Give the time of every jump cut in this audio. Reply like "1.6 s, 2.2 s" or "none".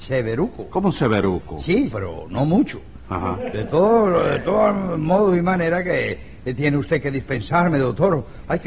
1.9 s